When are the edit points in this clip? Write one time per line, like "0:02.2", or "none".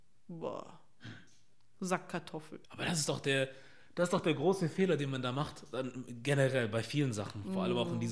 0:02.6